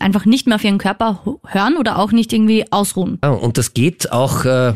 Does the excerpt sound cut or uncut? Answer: cut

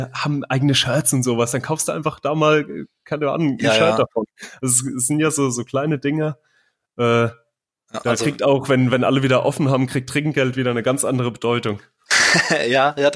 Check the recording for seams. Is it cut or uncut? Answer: uncut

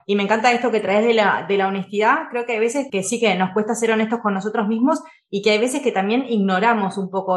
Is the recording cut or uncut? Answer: cut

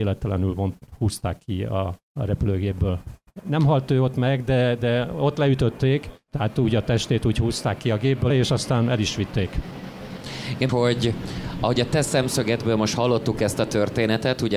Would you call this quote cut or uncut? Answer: cut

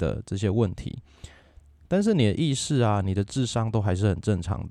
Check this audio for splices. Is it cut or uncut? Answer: uncut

